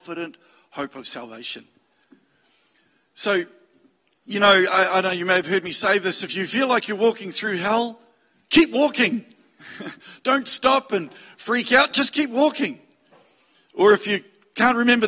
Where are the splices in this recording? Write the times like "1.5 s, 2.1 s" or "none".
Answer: none